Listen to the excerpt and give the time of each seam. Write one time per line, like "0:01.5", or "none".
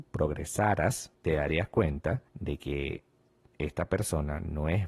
0:01.1
0:02.3